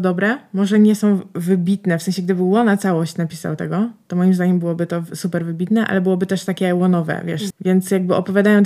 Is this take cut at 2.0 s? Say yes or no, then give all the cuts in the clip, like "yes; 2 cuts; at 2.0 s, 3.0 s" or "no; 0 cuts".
no; 1 cut; at 7.5 s